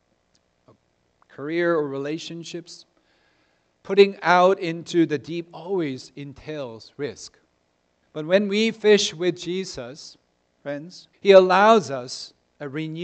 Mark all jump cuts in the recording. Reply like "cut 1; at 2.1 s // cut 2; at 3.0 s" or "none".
cut 1; at 8.0 s // cut 2; at 11.1 s